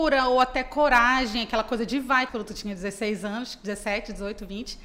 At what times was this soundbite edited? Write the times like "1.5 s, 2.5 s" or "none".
2.3 s